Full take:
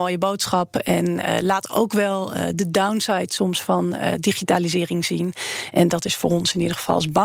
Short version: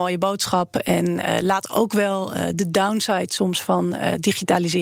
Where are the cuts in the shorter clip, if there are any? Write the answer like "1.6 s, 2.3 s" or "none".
none